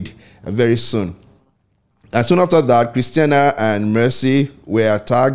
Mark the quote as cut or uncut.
uncut